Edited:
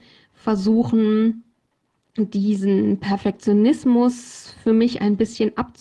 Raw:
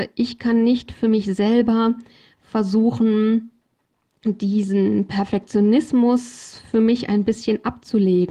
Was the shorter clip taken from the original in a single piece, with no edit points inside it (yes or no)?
yes